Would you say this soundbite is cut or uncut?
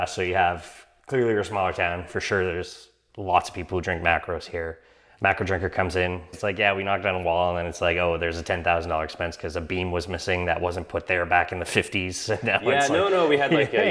cut